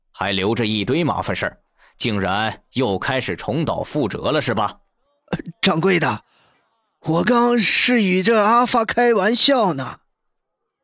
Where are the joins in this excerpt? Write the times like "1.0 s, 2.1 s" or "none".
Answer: 7.3 s